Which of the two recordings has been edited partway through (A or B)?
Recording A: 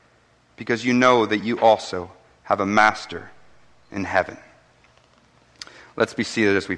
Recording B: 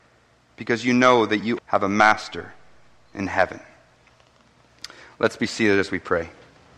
B